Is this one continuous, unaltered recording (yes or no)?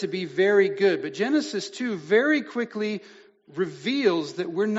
yes